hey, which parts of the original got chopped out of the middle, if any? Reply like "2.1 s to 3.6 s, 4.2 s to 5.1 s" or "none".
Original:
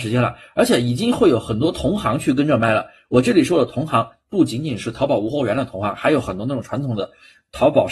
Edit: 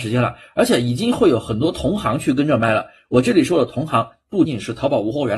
4.4 s to 4.6 s